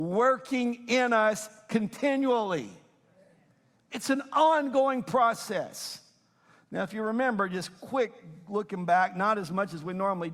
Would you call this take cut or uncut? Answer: uncut